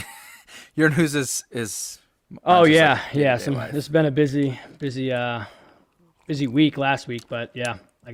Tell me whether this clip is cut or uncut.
uncut